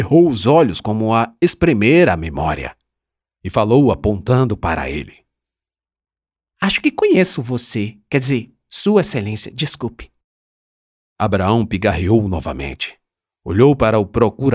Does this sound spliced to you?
no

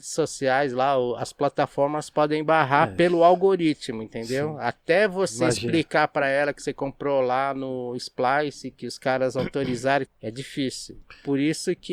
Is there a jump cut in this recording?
yes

